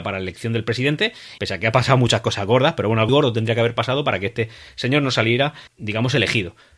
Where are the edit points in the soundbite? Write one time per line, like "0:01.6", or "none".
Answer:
0:01.4
0:03.1
0:05.7